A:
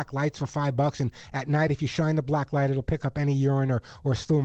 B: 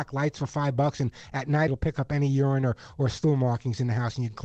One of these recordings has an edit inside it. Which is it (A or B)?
B